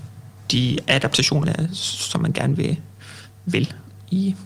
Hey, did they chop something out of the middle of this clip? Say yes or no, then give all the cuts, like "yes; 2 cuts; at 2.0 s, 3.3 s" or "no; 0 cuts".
yes; 1 cut; at 1.4 s